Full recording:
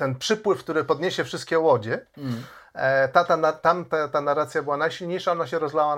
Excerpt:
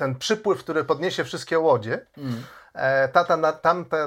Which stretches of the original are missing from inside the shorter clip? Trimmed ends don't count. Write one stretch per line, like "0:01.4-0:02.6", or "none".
none